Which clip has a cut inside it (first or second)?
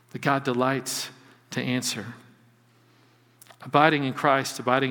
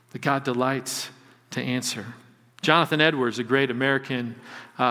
second